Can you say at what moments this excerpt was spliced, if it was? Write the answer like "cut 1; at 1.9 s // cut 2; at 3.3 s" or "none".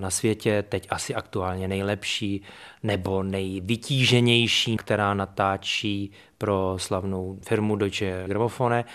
cut 1; at 4.8 s